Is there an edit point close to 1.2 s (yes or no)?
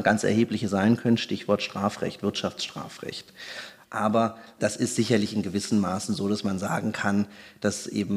no